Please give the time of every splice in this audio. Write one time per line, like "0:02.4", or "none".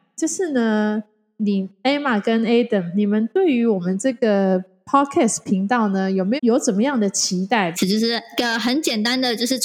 0:06.4
0:07.7